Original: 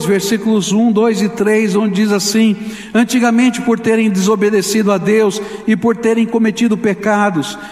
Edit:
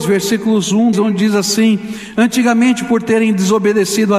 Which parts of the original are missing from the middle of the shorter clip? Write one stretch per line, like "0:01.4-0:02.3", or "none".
0:00.9-0:01.7